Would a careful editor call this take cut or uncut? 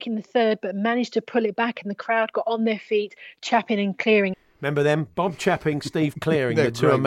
uncut